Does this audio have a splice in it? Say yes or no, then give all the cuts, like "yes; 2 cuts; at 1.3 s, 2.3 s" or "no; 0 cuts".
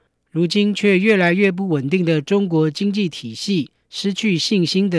no; 0 cuts